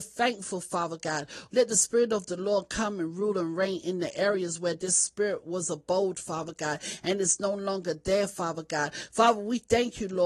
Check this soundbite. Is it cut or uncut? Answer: cut